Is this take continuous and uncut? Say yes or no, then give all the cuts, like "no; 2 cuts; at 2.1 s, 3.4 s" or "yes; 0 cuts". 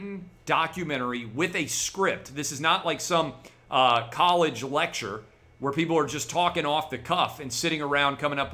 yes; 0 cuts